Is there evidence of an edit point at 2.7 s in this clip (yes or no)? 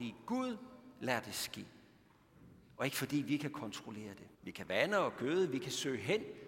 no